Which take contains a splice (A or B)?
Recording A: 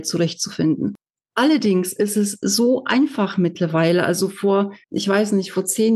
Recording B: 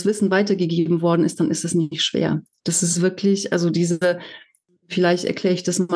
A